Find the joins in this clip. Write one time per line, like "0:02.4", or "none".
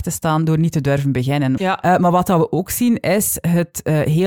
0:01.6